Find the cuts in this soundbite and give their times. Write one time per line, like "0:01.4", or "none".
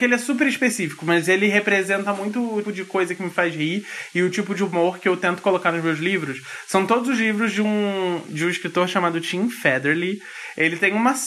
0:02.6